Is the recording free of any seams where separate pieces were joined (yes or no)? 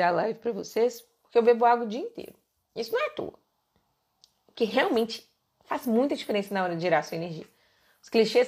yes